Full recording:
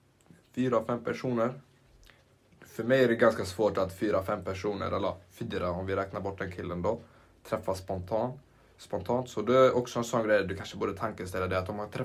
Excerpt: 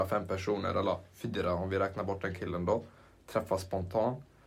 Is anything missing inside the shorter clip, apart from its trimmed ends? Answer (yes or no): no